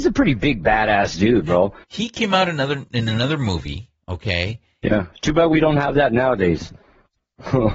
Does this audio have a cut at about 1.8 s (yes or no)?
yes